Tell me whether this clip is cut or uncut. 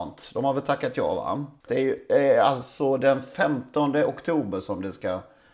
cut